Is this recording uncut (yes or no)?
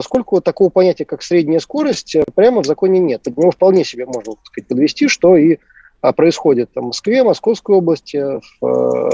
no